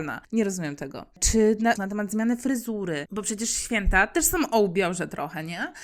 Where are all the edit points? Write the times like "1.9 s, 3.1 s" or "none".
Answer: 1.8 s, 3.1 s